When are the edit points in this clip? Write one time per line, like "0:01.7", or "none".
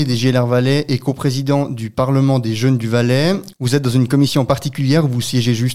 0:03.5